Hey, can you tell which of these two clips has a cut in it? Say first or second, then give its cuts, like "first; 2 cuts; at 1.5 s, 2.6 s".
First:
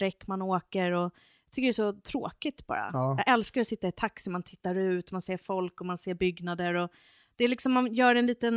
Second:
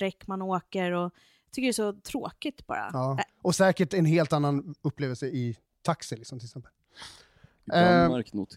second; 1 cut; at 3.3 s